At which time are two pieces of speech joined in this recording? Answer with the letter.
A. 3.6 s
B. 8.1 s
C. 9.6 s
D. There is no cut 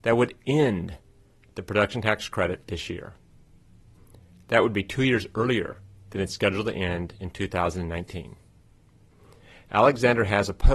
D